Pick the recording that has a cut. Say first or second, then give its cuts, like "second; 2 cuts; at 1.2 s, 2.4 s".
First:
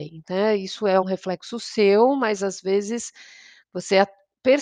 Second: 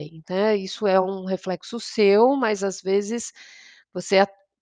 first; 1 cut; at 1.0 s